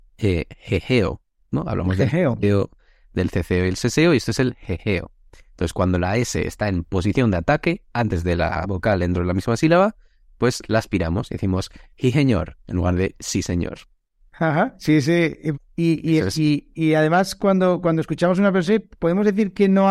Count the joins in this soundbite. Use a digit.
1